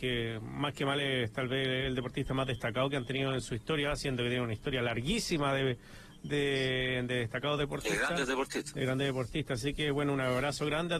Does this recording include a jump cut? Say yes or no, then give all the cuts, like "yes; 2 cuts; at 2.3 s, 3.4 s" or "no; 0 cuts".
no; 0 cuts